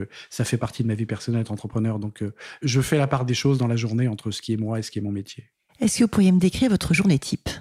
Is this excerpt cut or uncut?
uncut